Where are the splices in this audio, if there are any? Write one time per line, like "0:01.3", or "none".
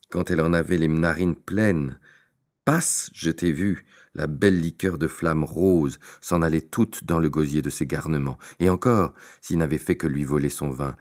none